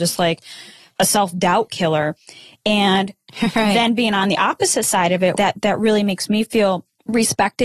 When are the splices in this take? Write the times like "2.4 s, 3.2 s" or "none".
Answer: 5.3 s